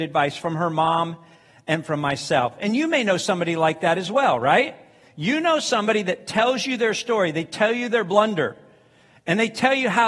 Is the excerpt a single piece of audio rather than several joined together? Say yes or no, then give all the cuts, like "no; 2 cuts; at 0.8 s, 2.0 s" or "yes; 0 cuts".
yes; 0 cuts